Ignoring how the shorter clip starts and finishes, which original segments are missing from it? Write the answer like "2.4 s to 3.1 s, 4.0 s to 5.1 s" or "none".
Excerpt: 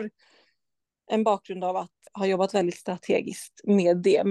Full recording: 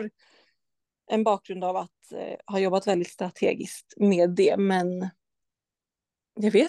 2.1 s to 2.4 s

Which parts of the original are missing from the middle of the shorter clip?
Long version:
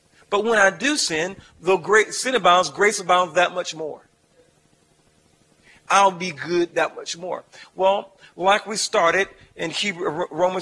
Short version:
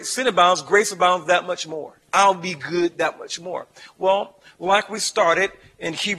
4.1 s to 5.8 s

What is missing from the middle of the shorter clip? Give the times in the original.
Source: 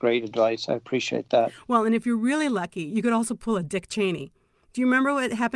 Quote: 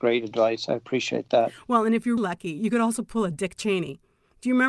2.2 s to 2.5 s

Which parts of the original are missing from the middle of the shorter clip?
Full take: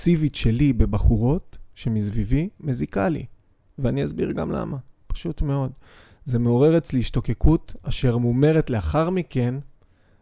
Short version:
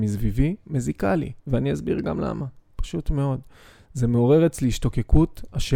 3.3 s to 3.7 s

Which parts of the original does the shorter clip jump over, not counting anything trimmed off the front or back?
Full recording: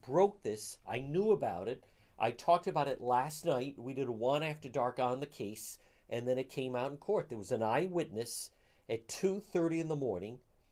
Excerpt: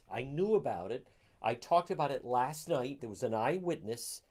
3.8 s to 7.3 s

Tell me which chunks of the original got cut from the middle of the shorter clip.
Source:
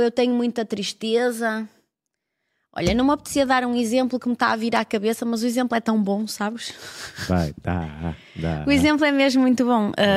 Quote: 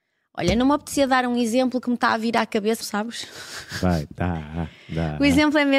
5.2 s to 6.3 s

